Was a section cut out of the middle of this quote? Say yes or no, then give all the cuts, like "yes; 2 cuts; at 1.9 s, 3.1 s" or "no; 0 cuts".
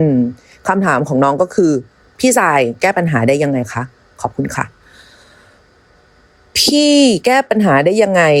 no; 0 cuts